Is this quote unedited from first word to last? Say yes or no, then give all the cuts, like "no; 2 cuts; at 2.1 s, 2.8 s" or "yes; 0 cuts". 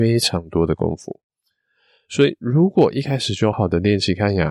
no; 1 cut; at 3.5 s